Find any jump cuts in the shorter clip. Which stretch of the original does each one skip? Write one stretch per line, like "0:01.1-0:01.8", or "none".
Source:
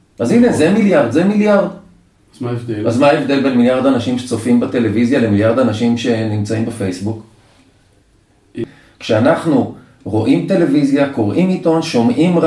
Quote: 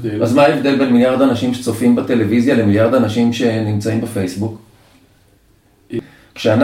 none

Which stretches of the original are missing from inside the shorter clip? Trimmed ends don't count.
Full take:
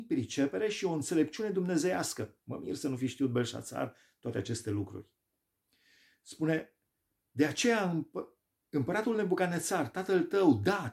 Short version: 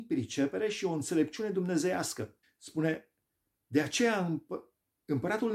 0:02.4-0:06.1

